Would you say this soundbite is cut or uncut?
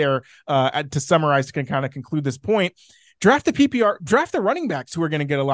uncut